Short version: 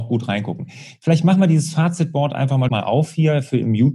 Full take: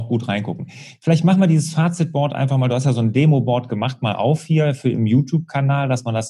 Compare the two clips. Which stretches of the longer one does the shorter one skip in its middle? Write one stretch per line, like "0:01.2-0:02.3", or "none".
0:02.7-0:04.0